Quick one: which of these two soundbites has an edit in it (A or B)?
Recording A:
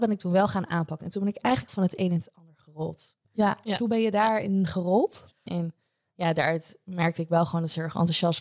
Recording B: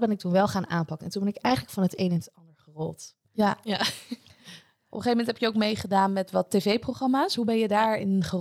A